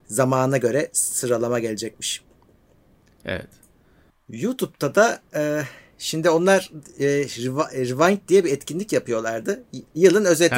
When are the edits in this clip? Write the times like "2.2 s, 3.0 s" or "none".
4.1 s